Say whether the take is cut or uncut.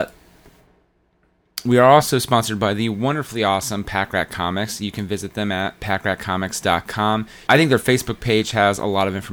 cut